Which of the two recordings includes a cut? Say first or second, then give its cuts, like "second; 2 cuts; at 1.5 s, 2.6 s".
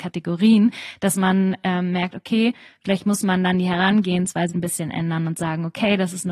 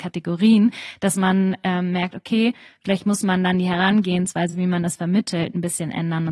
first; 1 cut; at 4.5 s